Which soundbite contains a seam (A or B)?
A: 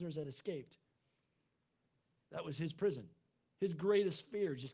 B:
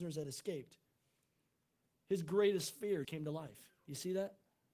B